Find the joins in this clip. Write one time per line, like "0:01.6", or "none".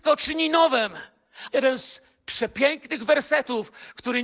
0:01.5